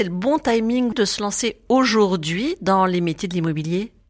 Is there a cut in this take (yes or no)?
yes